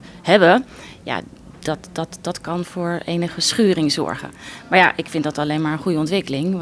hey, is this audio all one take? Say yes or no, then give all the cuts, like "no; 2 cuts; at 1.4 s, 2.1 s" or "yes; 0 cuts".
yes; 0 cuts